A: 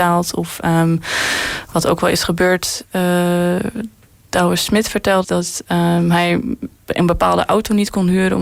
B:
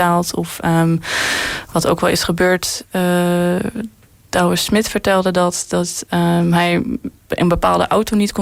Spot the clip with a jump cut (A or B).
A